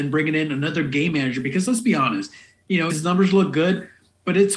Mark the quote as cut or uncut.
cut